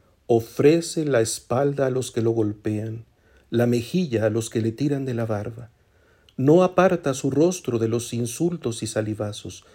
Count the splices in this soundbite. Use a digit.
0